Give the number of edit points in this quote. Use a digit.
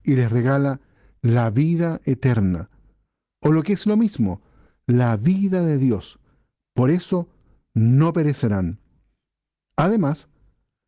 0